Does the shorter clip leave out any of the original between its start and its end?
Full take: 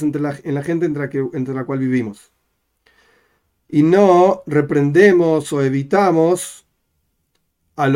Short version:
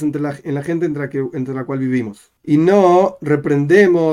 yes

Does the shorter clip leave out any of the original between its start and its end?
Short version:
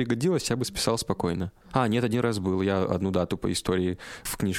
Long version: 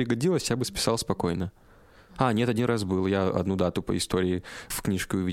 yes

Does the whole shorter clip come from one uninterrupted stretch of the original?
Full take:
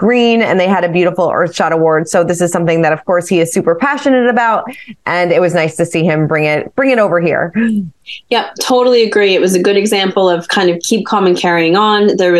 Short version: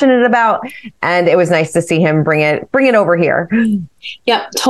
yes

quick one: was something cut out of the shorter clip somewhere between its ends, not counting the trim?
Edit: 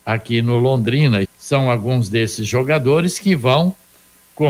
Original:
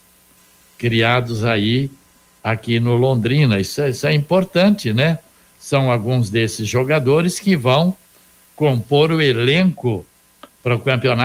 yes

